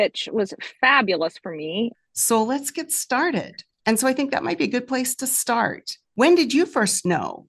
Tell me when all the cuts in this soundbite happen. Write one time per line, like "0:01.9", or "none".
0:01.9
0:03.8